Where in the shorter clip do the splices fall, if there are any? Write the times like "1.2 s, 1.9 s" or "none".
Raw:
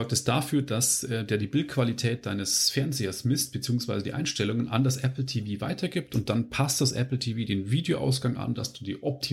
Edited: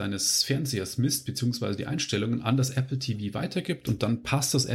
none